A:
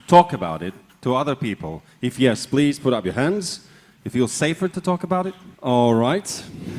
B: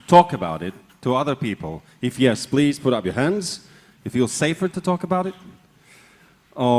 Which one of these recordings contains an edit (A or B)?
A